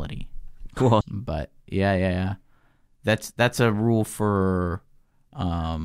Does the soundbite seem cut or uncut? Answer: cut